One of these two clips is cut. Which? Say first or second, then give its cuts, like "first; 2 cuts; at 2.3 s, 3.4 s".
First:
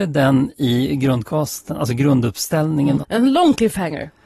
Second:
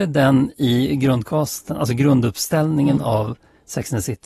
first; 1 cut; at 3.0 s